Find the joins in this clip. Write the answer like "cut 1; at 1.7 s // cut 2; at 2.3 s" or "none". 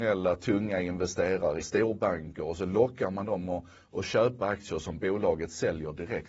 cut 1; at 1.6 s